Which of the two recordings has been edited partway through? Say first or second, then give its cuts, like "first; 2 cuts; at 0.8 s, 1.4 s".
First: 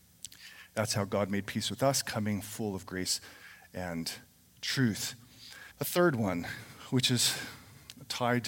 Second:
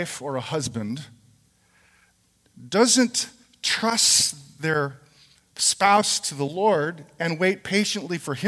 first; 1 cut; at 5.7 s